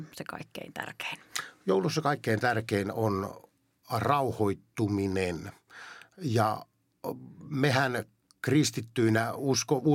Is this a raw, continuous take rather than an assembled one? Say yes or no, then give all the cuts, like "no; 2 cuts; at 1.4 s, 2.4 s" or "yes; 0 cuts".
yes; 0 cuts